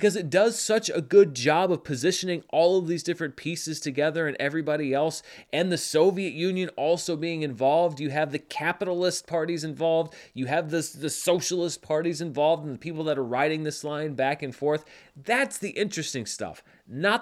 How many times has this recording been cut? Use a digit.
0